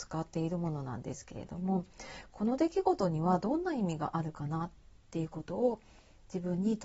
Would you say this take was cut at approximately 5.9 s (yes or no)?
no